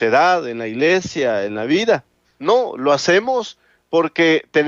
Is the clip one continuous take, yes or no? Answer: no